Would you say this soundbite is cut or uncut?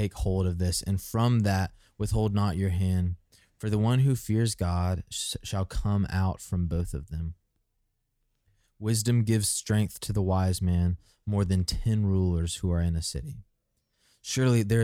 uncut